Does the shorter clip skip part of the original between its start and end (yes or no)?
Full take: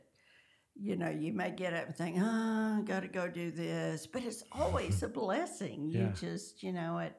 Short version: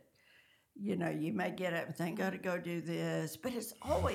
yes